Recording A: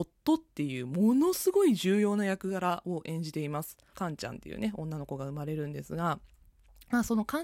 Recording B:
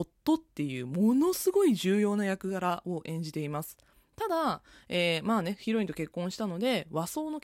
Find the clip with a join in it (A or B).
A